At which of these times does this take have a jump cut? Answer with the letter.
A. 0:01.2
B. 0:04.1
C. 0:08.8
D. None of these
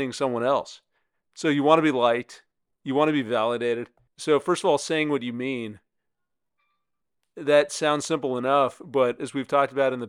B